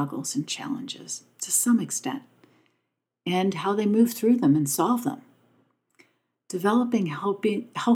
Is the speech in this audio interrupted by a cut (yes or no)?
no